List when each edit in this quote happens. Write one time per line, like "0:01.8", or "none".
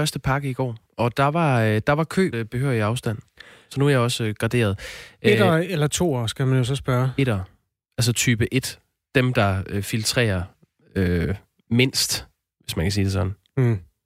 0:02.3